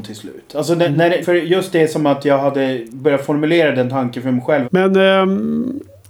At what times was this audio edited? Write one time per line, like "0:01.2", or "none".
0:01.2
0:04.6